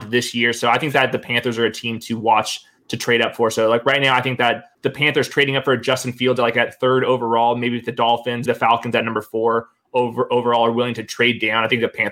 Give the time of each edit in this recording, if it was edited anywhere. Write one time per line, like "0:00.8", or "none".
0:08.5